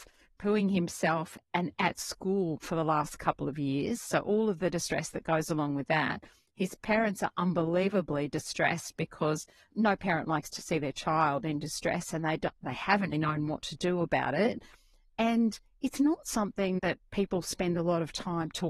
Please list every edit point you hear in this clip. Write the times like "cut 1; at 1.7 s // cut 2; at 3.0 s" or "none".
cut 1; at 13.1 s // cut 2; at 16.8 s